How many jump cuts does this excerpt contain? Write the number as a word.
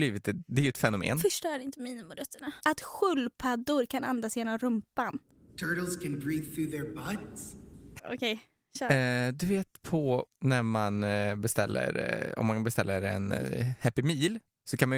three